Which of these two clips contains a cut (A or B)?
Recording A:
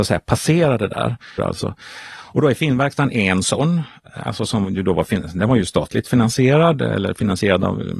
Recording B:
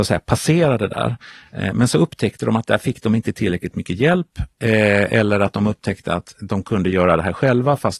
A